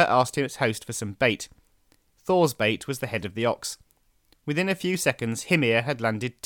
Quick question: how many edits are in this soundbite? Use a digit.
1